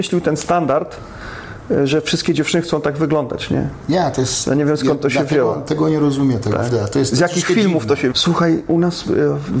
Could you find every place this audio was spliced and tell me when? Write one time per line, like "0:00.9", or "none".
0:06.7
0:08.1